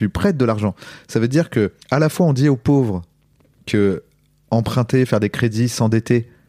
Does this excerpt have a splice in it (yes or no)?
yes